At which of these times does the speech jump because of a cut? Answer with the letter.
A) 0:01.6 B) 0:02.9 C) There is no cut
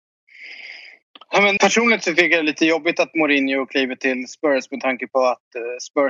A